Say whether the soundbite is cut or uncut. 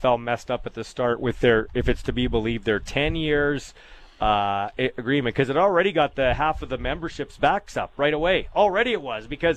cut